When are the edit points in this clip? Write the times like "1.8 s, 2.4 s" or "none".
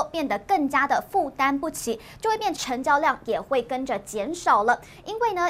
2.6 s